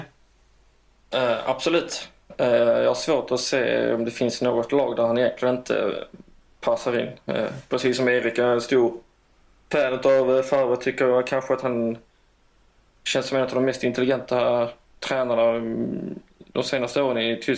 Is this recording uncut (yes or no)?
no